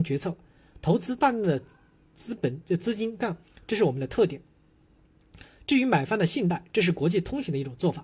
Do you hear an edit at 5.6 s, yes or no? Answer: no